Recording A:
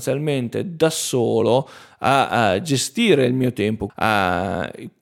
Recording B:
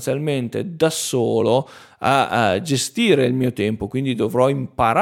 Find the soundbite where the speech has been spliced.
A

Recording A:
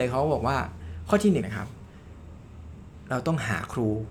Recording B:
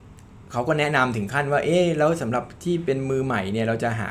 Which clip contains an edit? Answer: A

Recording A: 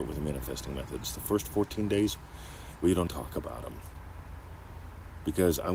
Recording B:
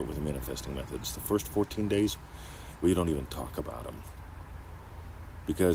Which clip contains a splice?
A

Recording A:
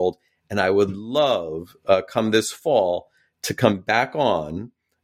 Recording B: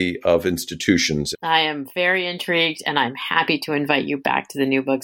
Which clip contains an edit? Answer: B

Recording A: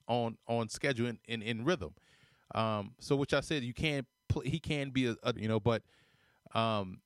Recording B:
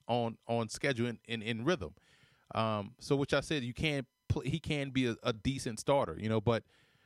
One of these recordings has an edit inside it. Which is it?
A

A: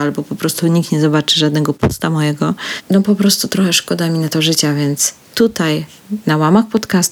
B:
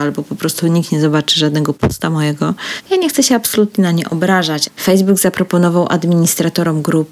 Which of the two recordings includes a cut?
B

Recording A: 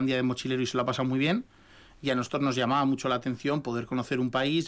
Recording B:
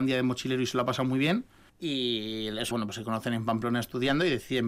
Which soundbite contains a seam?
B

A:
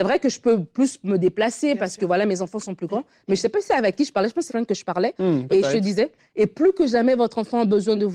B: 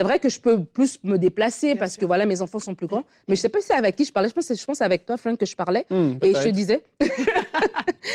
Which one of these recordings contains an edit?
A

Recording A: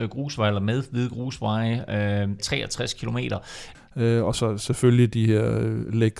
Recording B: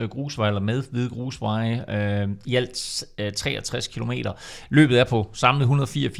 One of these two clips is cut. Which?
A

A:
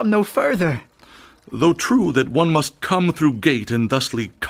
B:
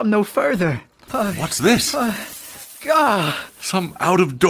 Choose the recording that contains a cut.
B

